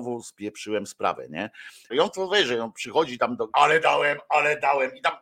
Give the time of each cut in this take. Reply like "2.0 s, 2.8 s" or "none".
1.9 s, 3.5 s